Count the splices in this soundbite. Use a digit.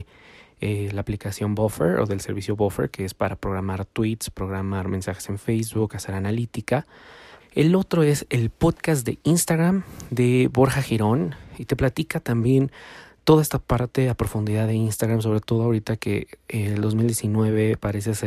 1